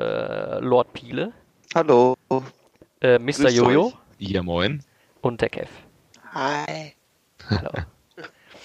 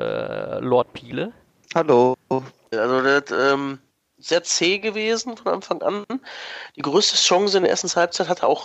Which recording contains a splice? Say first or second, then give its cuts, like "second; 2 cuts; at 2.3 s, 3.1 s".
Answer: second; 1 cut; at 2.7 s